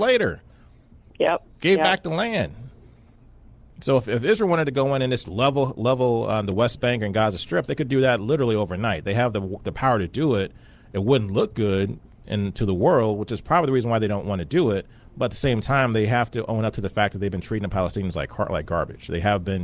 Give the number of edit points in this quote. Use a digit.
1